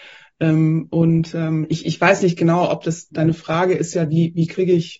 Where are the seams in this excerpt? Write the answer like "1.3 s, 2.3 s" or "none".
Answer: 3.1 s